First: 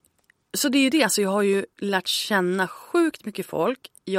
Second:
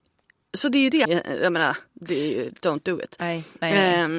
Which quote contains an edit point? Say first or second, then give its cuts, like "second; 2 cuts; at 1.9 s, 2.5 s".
second; 1 cut; at 1.0 s